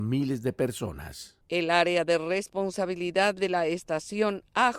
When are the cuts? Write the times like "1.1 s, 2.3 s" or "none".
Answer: none